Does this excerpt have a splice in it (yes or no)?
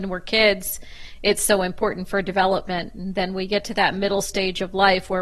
no